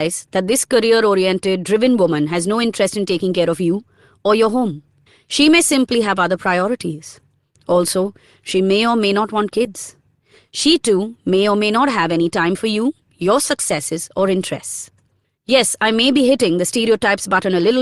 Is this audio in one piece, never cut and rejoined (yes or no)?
yes